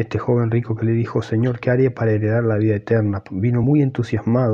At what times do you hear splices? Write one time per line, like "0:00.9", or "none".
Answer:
none

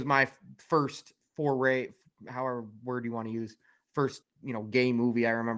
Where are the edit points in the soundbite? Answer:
0:04.2

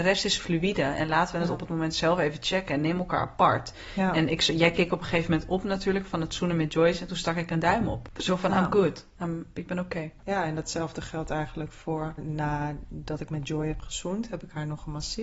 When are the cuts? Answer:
0:12.2

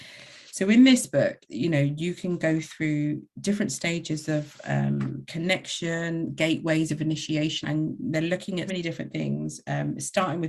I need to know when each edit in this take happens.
0:01.4
0:07.6
0:08.7

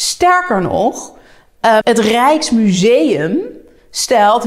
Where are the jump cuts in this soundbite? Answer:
0:01.8

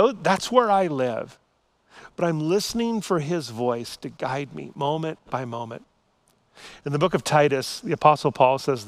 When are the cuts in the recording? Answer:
none

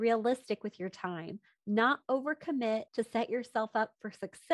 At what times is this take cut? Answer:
0:02.9

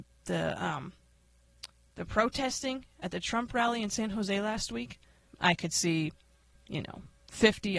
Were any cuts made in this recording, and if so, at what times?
0:05.3

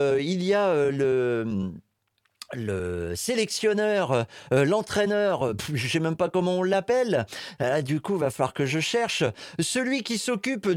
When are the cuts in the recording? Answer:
none

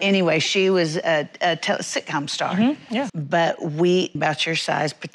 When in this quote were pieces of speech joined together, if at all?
0:03.1
0:04.2

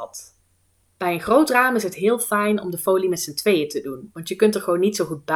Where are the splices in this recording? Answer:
none

